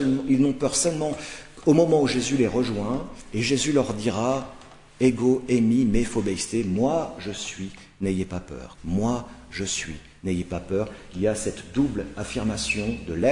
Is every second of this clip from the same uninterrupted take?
no; 1 cut; at 8.8 s

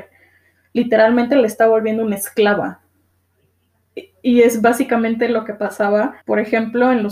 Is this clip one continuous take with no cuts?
no; 1 cut; at 6.2 s

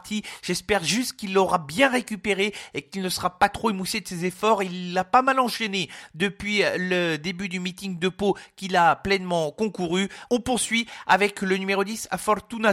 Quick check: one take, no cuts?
no; 1 cut; at 10.3 s

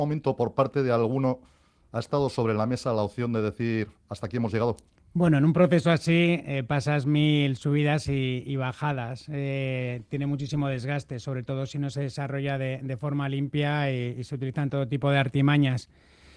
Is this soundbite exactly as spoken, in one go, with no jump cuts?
yes; 0 cuts

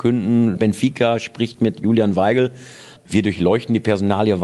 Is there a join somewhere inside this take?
yes; 1 cut; at 3.0 s

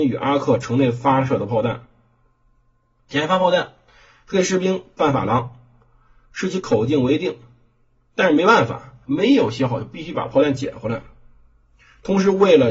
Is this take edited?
yes; 1 cut; at 9.0 s

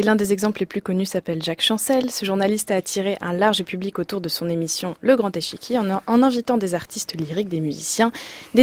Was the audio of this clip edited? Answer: no; 0 cuts

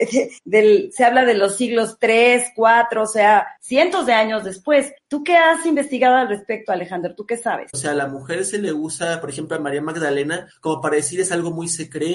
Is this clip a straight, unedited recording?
no; 1 cut; at 7.7 s

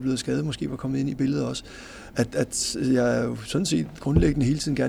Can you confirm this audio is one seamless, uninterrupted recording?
yes; 0 cuts

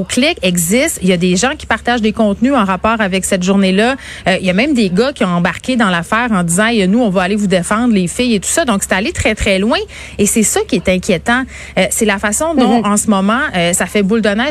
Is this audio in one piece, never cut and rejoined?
yes; 0 cuts

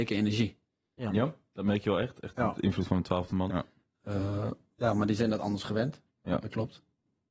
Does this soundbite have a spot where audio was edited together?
yes; 1 cut; at 3.5 s

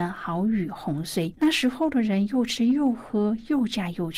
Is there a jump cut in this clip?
yes; 1 cut; at 1.3 s

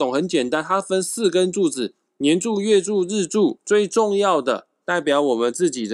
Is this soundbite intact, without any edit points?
no; 1 cut; at 3.6 s

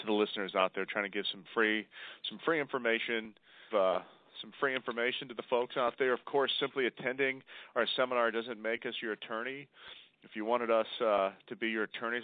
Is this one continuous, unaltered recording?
no; 1 cut; at 3.7 s

